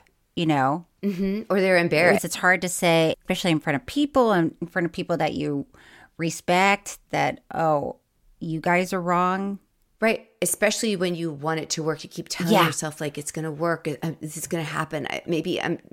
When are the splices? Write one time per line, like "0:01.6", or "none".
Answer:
0:02.2